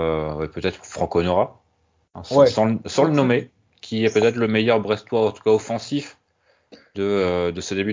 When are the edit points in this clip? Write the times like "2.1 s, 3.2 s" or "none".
none